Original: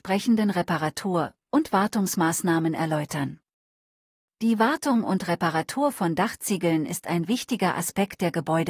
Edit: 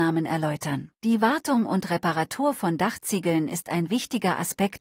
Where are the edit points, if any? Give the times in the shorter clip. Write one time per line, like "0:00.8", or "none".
0:01.0